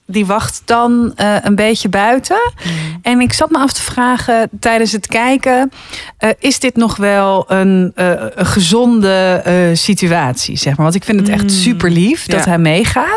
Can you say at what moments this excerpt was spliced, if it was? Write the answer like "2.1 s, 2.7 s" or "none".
none